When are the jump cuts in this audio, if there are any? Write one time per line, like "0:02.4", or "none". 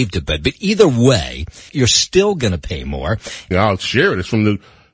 0:01.7
0:03.5

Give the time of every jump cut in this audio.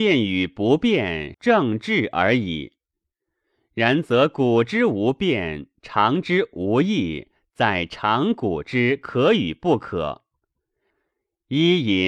0:01.3

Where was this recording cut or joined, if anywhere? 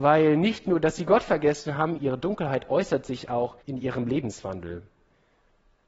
0:02.0
0:03.6

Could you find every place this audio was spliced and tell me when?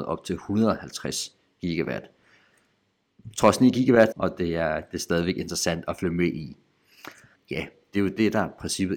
0:04.1
0:07.4

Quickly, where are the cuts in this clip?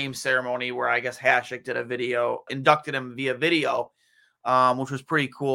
0:02.5

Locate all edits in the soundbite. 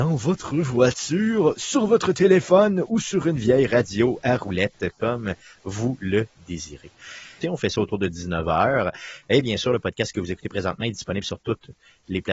0:07.4

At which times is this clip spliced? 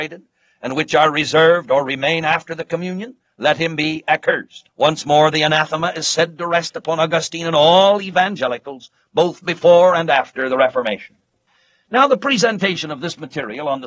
0:04.7

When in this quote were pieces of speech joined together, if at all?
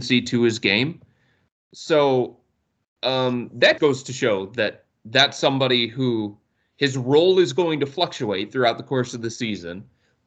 0:01.5
0:03.8

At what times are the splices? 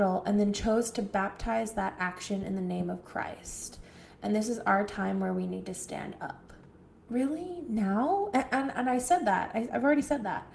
none

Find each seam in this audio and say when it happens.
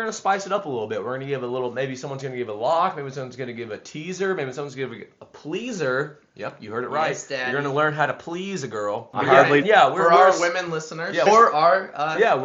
0:09.6
0:11.3

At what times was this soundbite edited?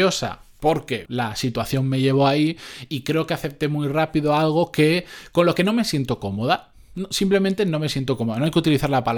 0:01.1

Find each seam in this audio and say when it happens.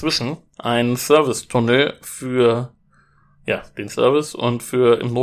none

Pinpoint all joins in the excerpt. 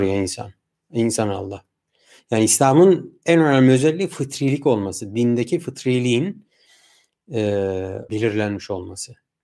0:08.1

